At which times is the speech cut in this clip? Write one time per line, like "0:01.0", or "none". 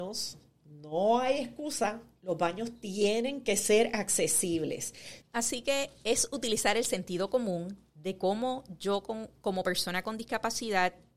0:05.2